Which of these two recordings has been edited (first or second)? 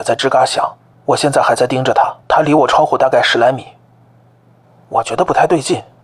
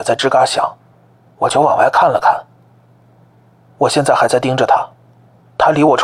first